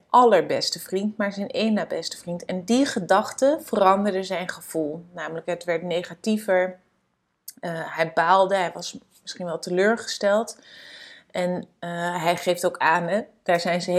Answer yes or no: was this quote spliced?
no